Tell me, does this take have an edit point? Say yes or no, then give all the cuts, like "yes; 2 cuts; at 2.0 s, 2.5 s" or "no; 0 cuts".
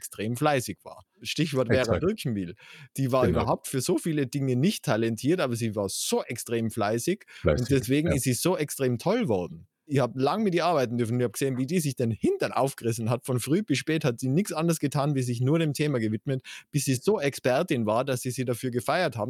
yes; 1 cut; at 1.2 s